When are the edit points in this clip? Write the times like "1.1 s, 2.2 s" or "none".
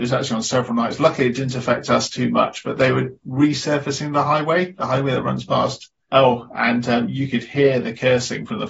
6.1 s